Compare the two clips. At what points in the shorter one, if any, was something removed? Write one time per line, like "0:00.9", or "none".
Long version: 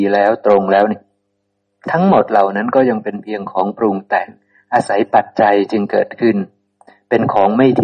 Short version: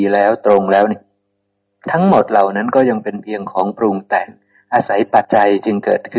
0:05.2